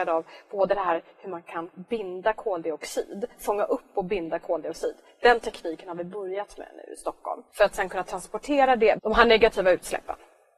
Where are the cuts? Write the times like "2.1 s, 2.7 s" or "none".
7.5 s, 9.0 s